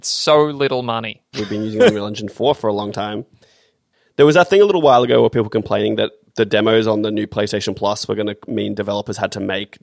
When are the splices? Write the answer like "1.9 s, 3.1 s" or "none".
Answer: 1.3 s